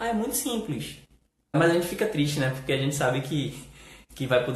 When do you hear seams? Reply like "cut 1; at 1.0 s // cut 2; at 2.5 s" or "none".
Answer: cut 1; at 1.5 s

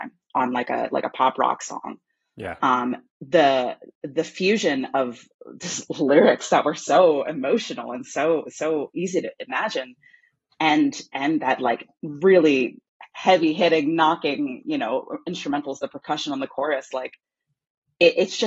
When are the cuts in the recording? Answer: none

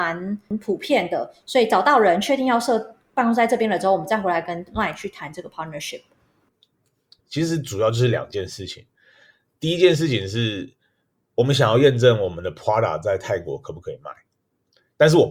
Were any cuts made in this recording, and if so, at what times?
cut 1; at 7.2 s

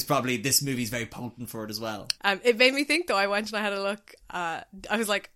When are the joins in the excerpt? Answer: cut 1; at 2.1 s

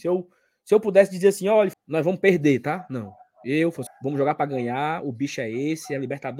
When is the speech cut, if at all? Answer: cut 1; at 1.7 s // cut 2; at 3.9 s

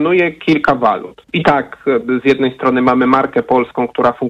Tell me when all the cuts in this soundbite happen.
cut 1; at 1.2 s

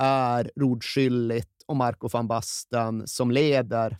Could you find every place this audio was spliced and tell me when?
none

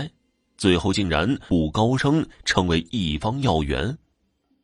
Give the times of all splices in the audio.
cut 1; at 1.5 s

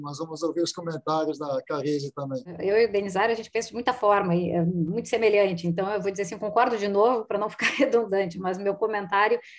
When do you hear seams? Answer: none

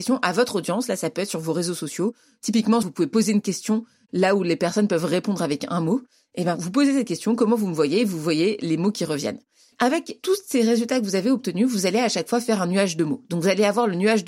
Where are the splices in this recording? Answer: cut 1; at 2.8 s

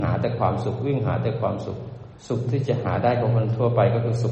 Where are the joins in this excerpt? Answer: cut 1; at 2.2 s

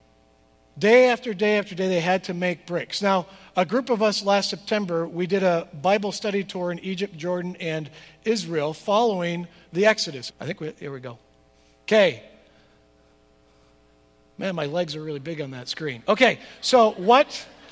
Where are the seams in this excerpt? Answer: cut 1; at 10.3 s

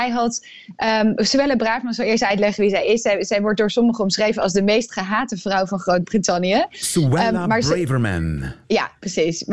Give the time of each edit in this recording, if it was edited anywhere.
cut 1; at 8.6 s

